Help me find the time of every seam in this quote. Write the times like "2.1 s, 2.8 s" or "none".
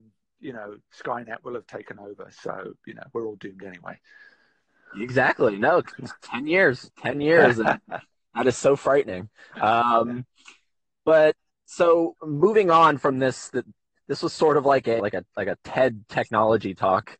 15.0 s

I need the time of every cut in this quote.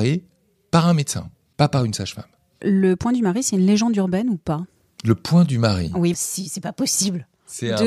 6.1 s

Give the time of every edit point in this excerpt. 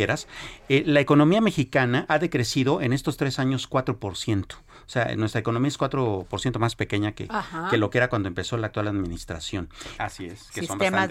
10.0 s

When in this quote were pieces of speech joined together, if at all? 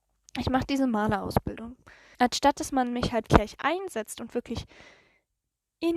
2.1 s, 3.3 s

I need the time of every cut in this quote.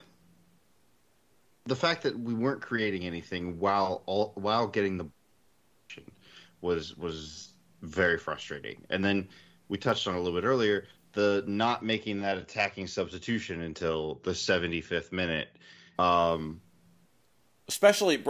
15.9 s

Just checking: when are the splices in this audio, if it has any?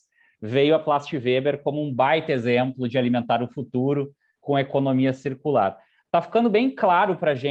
none

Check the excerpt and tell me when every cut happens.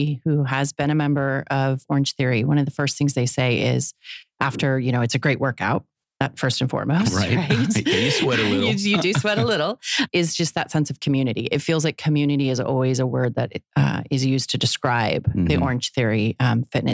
none

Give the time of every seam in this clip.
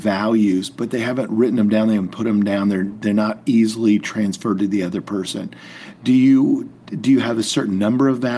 none

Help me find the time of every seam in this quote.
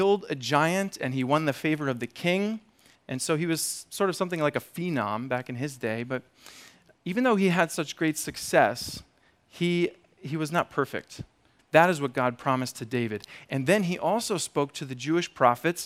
2.9 s, 7.0 s, 11.6 s

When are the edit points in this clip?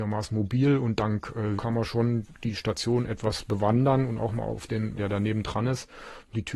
1.6 s, 5.0 s

